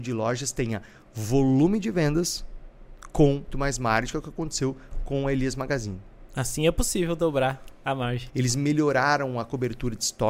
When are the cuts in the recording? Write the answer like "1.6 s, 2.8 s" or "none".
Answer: 3.5 s, 8.3 s

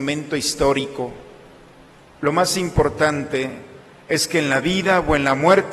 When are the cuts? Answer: none

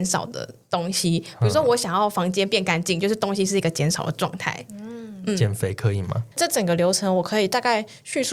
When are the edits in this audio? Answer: 6.3 s

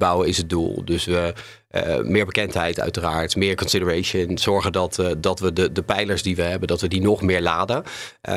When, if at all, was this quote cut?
none

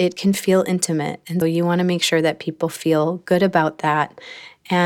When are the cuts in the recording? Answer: 1.4 s

